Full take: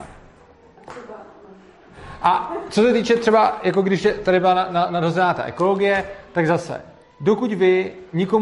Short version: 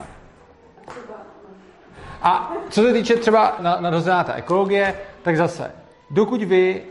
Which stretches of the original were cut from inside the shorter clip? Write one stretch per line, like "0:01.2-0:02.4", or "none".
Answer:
0:03.6-0:04.7